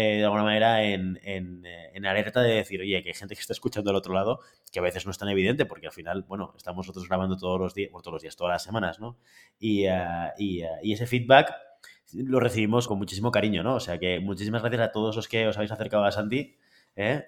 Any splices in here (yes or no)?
yes